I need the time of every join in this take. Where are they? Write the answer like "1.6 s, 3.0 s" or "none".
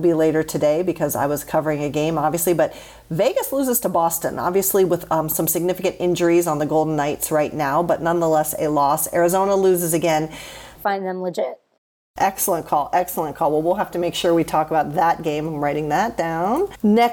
10.8 s